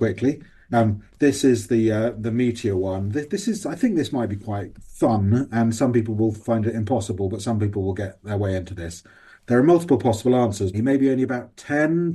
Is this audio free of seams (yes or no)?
no